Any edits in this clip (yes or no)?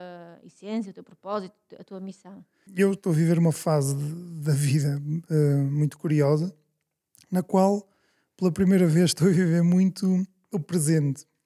yes